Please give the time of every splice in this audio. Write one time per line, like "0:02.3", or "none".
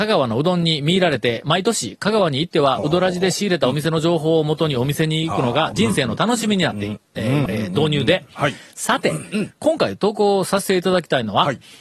0:07.5